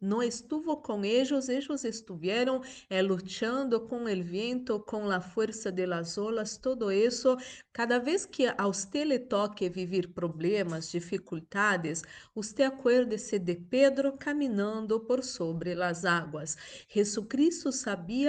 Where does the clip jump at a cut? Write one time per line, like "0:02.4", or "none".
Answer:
0:07.7